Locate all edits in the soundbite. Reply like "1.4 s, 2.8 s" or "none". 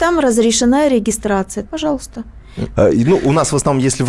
1.7 s, 2.8 s